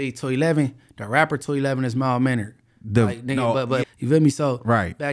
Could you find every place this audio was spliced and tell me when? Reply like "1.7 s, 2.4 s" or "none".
3.8 s